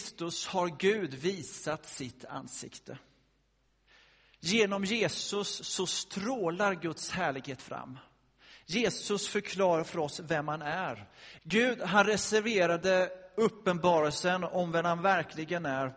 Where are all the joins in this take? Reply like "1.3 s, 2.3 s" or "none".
11.4 s